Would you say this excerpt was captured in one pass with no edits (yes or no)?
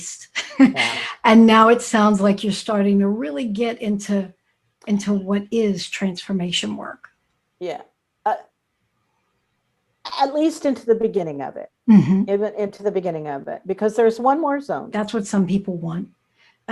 no